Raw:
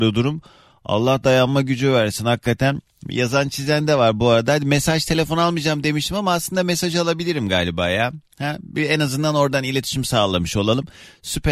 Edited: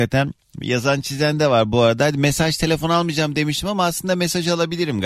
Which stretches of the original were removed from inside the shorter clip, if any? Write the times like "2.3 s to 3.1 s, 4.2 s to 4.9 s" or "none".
none